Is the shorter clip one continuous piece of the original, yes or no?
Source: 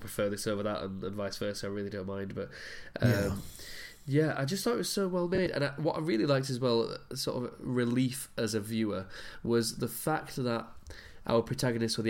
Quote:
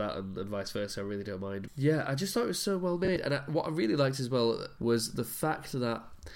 no